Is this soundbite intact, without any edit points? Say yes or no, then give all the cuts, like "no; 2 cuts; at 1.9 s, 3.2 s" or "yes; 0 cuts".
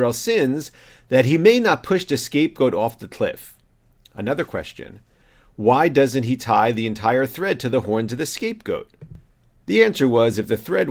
yes; 0 cuts